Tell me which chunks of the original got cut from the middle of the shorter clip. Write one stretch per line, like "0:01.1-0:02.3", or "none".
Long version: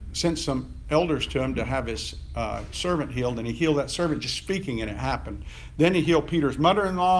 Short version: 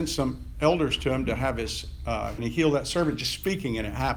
0:02.7-0:03.4